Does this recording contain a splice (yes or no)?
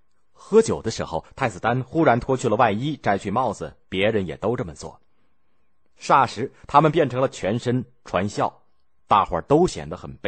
no